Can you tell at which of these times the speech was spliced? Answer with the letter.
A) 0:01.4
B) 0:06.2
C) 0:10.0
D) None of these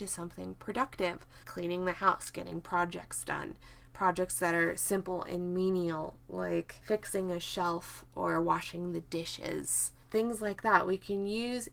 A